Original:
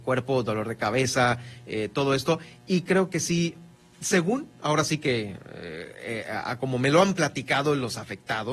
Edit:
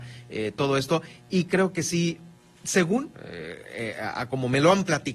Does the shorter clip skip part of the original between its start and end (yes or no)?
yes